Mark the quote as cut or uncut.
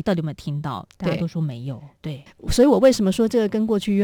cut